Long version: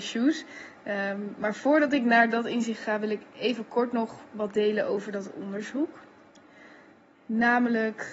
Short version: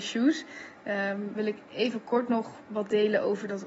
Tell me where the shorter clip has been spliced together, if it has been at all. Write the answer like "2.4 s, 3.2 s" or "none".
1.3 s

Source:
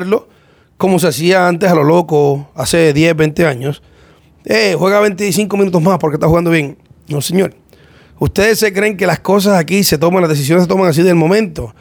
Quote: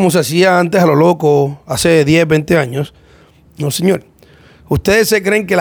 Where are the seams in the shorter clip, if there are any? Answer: 3.5 s

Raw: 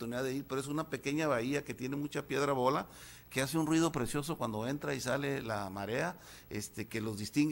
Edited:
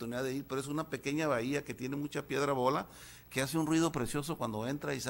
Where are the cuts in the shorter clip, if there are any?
none

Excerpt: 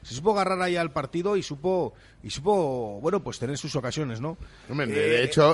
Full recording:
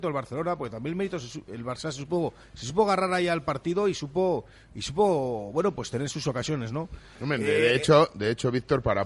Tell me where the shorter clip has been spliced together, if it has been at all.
none

